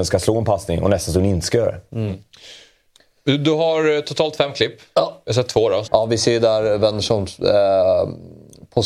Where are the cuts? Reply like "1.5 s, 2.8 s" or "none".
5.8 s